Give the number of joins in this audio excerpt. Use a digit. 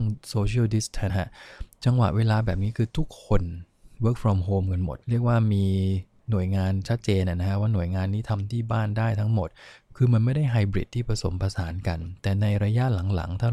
2